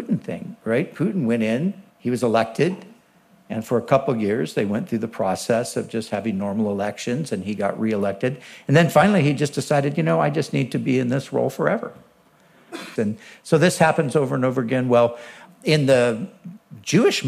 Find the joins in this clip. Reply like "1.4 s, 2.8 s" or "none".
1.9 s, 13.0 s